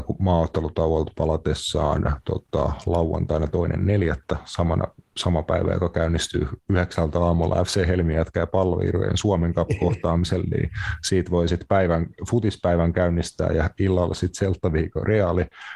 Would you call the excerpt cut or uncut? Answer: uncut